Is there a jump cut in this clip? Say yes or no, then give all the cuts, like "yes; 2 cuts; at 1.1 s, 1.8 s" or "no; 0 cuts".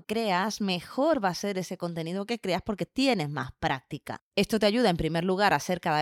no; 0 cuts